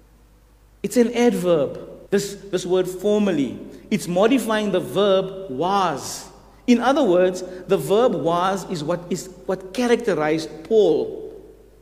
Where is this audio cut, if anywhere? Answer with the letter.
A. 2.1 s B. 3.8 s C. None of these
A